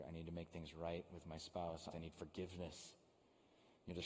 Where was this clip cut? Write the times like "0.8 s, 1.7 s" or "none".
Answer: 1.9 s